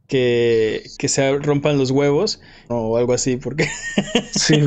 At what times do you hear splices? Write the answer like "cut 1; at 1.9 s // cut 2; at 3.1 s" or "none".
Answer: cut 1; at 0.9 s // cut 2; at 2.7 s